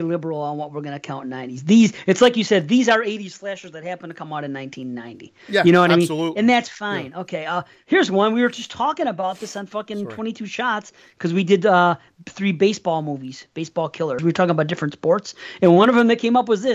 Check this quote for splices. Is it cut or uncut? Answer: cut